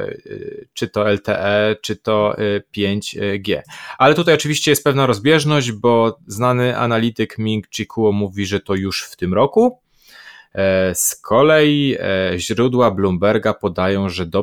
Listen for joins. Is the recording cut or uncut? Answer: uncut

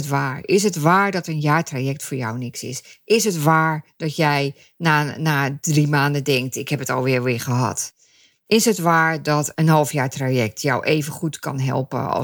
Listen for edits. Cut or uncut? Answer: uncut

